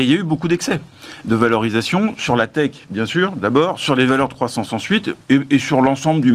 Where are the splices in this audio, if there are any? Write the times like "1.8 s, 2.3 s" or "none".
none

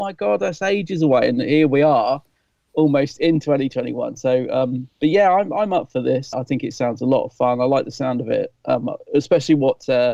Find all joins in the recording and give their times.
6.3 s

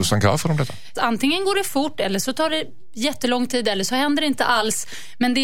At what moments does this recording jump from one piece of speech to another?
0.9 s

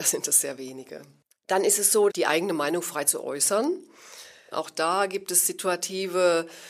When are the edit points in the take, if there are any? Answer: 2.1 s, 4.5 s

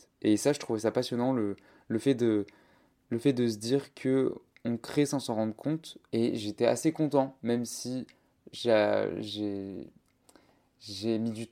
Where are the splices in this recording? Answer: 6.1 s

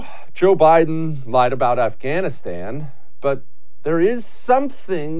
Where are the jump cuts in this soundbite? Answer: none

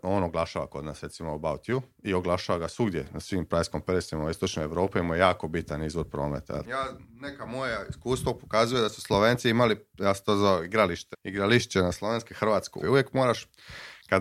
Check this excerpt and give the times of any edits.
6.7 s, 11.1 s, 12.8 s

